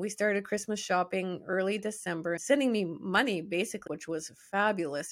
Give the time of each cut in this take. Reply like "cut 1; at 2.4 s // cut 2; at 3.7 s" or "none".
cut 1; at 2.4 s // cut 2; at 3.9 s